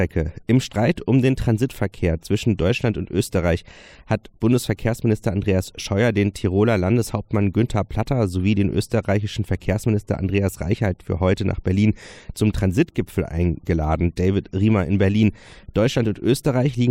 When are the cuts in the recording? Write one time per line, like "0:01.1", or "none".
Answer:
none